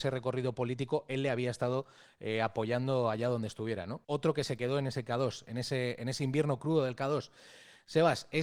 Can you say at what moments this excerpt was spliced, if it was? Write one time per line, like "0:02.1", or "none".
0:04.0